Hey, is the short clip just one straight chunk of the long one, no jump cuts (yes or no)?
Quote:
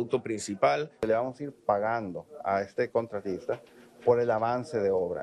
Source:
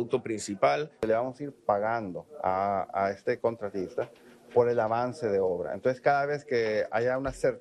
no